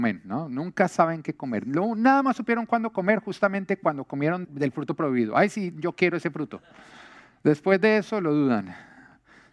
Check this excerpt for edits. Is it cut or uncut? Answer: cut